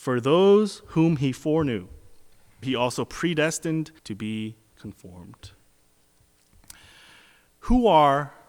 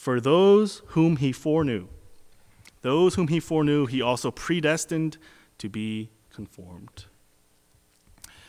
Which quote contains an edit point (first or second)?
first